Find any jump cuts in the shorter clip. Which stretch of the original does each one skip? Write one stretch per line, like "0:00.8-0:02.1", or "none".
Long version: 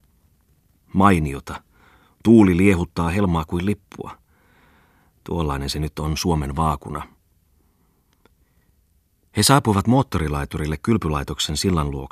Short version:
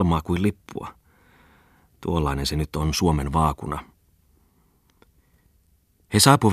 none